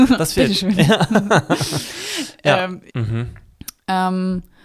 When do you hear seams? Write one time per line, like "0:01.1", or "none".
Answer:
0:02.9